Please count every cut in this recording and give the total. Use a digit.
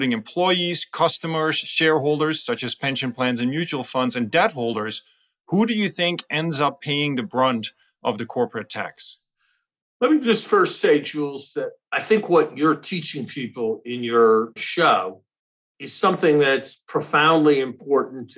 1